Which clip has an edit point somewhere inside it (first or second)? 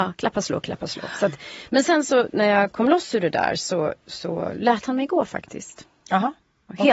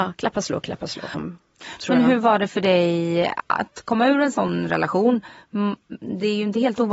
second